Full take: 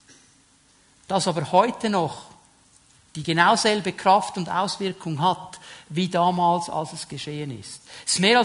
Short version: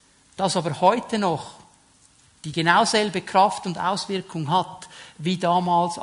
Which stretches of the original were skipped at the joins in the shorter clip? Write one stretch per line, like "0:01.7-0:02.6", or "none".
none